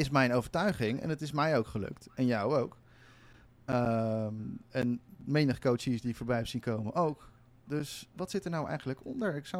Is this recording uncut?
no; 1 cut; at 8.1 s

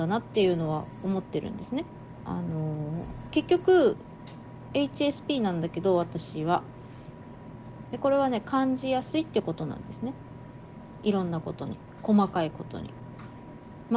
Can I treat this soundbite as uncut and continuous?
no; 1 cut; at 2.2 s

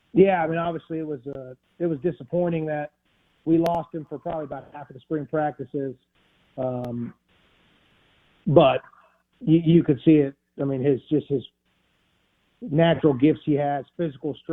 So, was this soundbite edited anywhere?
no; 0 cuts

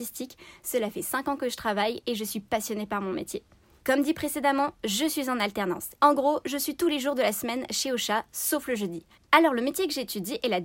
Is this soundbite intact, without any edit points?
no; 2 cuts; at 6.0 s, 9.2 s

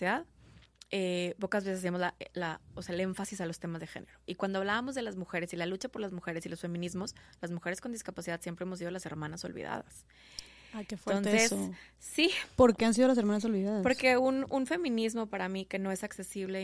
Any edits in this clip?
no; 0 cuts

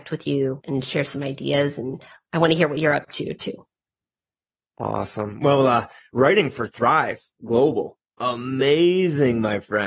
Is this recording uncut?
yes; 0 cuts

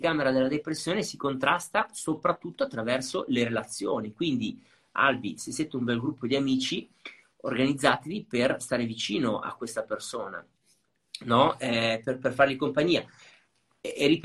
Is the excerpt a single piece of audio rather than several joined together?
no; 1 cut; at 9.4 s

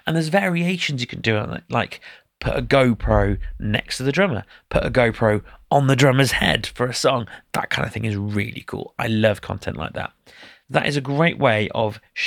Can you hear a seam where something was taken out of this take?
no; 0 cuts

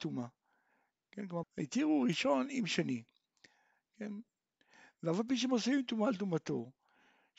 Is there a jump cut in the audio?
yes; 1 cut; at 1.4 s

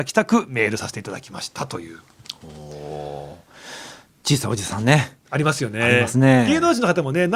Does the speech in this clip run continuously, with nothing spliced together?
yes; 0 cuts

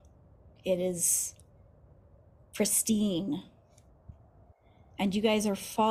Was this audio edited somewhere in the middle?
no; 0 cuts

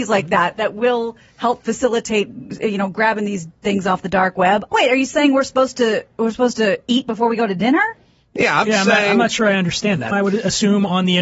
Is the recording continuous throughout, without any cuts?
no; 2 cuts; at 4.7 s, 10.1 s

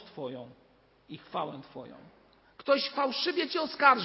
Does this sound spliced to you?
yes; 1 cut; at 2.4 s

